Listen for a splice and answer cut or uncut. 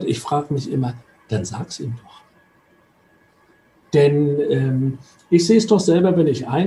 uncut